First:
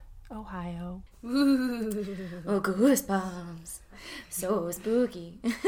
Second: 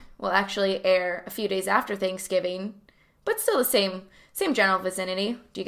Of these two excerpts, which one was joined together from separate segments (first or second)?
first